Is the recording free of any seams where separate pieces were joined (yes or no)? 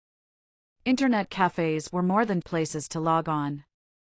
no